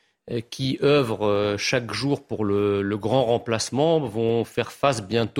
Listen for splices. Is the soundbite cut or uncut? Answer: uncut